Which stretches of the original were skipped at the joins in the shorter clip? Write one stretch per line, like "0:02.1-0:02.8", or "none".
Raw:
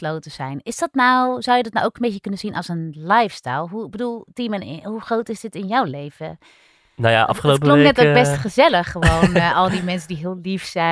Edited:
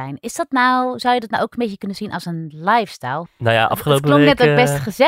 0:03.7-0:06.8